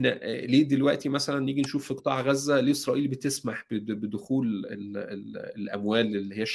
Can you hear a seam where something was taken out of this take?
no; 0 cuts

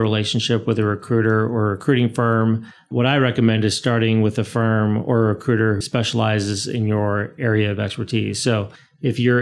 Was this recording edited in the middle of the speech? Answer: yes; 1 cut; at 5.8 s

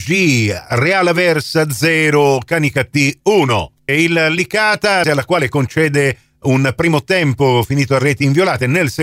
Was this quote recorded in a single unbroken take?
no; 2 cuts; at 3.9 s, 5.0 s

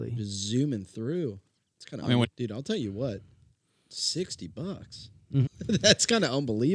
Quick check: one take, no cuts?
no; 2 cuts; at 2.2 s, 5.5 s

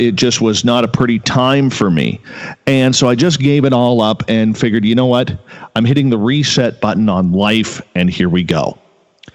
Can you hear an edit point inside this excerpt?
no; 0 cuts

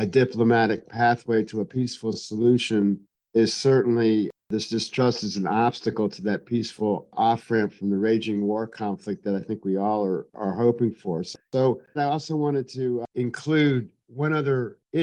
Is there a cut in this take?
yes; 1 cut; at 12.0 s

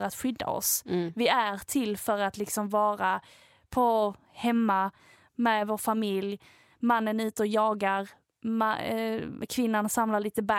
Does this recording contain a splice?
no; 0 cuts

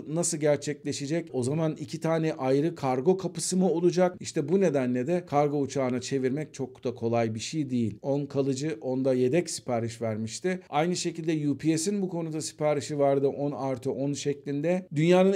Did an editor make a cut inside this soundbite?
yes; 2 cuts; at 4.2 s, 8.0 s

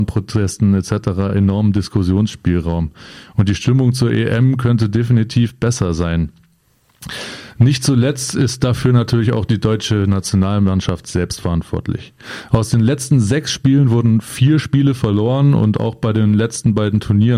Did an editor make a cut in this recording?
no; 0 cuts

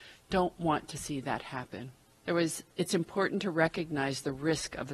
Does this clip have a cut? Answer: yes; 1 cut; at 2.2 s

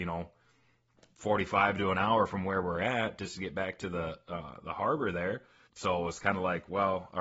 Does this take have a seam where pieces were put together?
yes; 1 cut; at 5.7 s

